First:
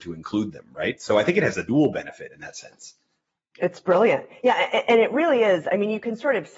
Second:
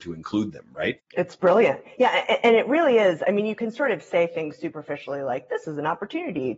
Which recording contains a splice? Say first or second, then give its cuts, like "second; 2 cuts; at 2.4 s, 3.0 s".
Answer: second; 1 cut; at 1.0 s